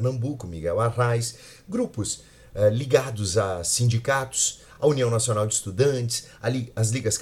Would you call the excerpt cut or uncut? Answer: uncut